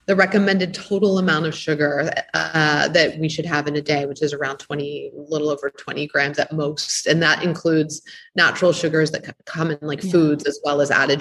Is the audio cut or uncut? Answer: uncut